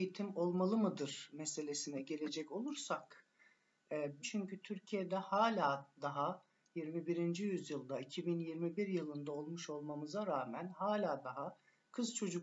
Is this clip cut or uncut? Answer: cut